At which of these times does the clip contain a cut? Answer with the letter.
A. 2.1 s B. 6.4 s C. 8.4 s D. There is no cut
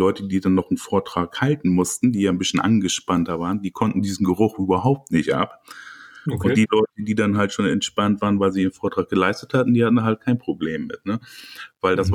D